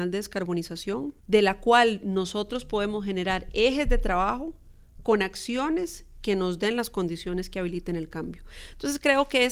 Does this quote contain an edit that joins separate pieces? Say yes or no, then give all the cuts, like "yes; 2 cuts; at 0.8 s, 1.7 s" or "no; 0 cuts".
yes; 1 cut; at 1.2 s